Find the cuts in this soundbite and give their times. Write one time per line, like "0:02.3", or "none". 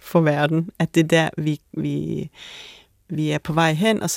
none